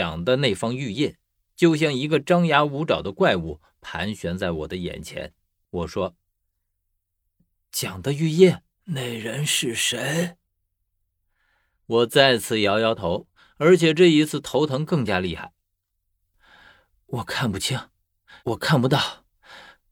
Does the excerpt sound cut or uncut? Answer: cut